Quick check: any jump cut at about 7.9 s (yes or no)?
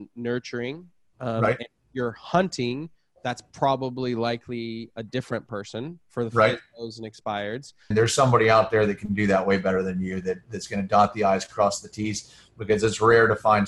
yes